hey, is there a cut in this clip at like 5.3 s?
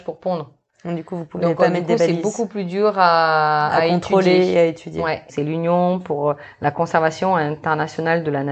yes; 1 cut; at 5.3 s

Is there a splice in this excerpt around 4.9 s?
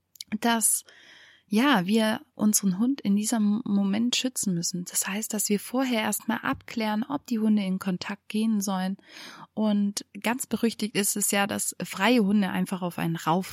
no; 0 cuts

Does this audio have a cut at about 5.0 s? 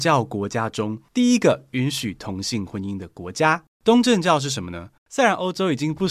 yes; 2 cuts; at 3.7 s, 5.0 s

